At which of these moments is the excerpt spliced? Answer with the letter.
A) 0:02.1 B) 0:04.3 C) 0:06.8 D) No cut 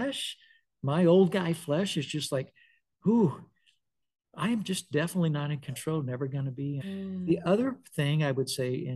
C